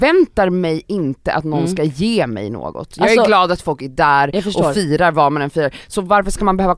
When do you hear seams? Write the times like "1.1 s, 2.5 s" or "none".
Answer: none